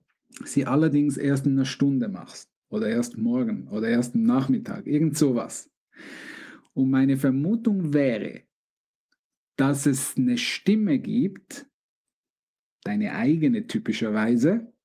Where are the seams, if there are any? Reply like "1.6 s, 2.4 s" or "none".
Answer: none